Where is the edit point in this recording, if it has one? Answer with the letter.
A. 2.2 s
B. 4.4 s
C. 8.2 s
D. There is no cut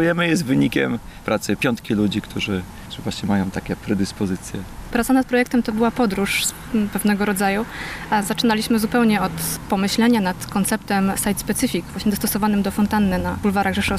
D